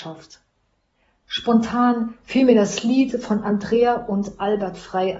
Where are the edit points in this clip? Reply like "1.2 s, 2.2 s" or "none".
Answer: 1.2 s